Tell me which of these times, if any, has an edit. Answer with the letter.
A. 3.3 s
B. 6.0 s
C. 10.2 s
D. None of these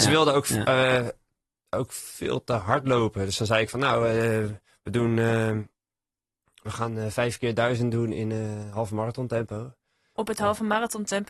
C